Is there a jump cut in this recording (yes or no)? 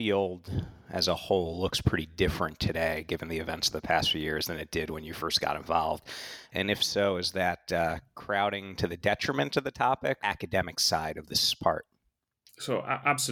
yes